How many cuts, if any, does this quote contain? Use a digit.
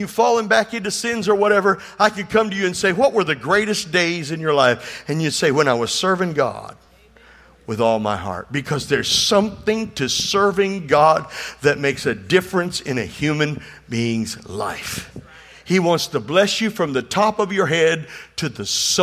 0